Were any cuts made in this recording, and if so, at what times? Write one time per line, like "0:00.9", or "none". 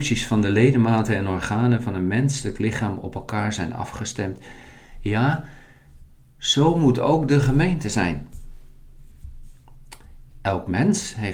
0:10.3